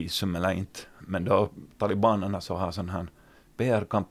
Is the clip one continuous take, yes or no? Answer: yes